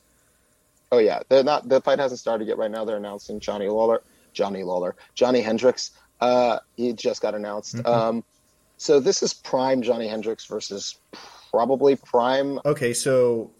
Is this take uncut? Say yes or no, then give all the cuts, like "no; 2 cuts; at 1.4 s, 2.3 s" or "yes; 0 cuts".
no; 1 cut; at 12.6 s